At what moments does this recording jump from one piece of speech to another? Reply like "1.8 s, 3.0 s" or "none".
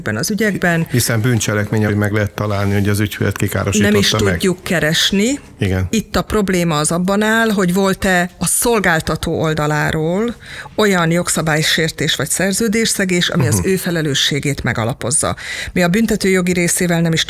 1.9 s